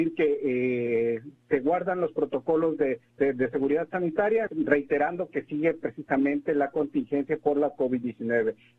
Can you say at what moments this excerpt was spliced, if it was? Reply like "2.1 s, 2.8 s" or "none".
3.1 s, 4.5 s